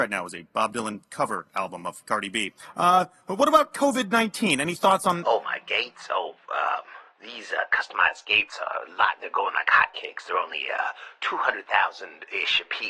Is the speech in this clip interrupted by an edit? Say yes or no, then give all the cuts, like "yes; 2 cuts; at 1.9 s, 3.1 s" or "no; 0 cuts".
no; 0 cuts